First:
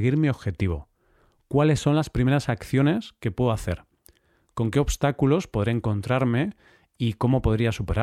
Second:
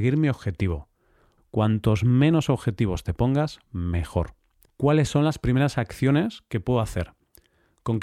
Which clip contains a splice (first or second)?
second